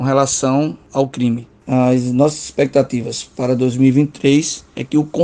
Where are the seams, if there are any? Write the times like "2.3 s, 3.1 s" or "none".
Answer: 1.6 s